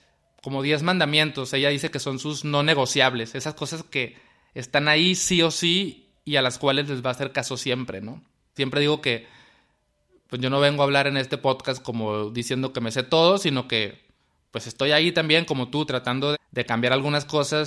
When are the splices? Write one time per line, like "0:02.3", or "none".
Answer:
0:08.6
0:16.3